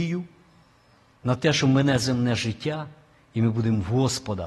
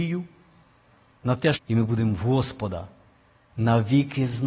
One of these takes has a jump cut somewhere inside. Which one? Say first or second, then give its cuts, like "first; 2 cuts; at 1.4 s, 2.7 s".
second; 1 cut; at 1.5 s